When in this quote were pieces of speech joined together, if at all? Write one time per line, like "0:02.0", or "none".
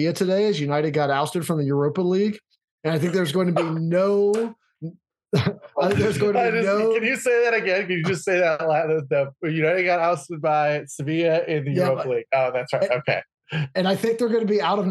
none